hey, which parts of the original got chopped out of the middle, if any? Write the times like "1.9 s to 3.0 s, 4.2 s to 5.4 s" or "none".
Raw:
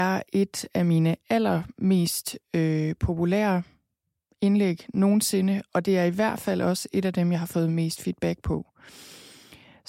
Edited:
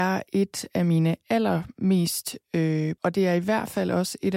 3.0 s to 5.7 s